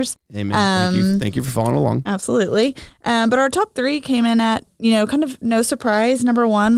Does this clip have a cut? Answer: no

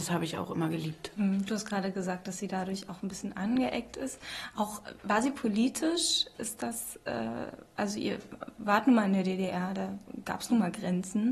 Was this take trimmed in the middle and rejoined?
no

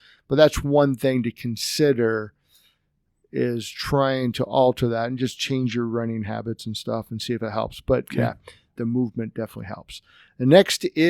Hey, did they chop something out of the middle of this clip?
yes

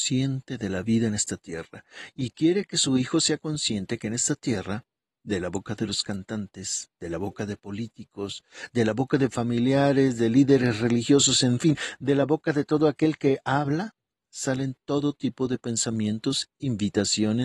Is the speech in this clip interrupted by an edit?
no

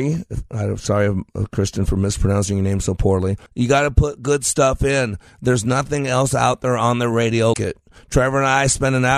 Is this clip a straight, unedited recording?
no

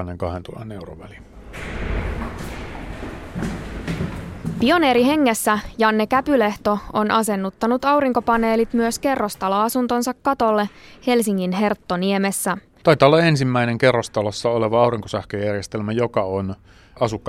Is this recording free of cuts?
no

